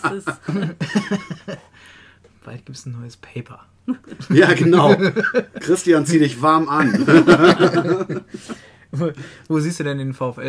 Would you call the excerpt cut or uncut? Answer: uncut